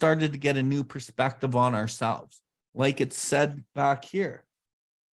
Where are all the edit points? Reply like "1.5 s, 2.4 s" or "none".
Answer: 2.6 s